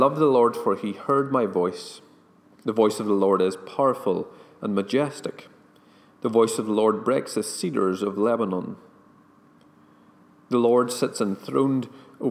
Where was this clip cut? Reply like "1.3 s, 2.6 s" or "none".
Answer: 2.4 s